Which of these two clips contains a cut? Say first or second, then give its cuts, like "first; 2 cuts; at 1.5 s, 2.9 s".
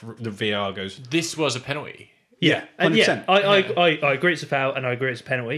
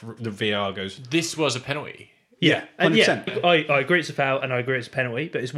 second; 1 cut; at 3.3 s